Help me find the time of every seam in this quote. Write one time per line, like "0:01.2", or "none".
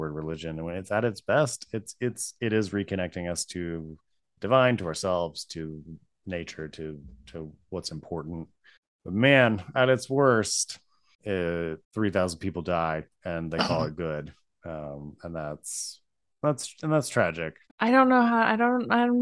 0:11.8
0:14.5
0:17.7